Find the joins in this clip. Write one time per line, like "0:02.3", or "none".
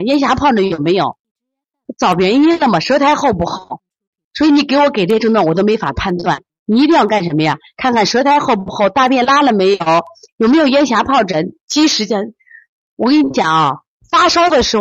0:11.6